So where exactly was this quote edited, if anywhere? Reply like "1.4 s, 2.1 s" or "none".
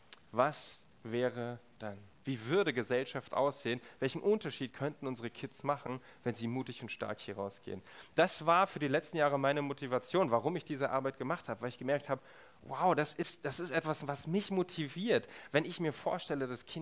2.1 s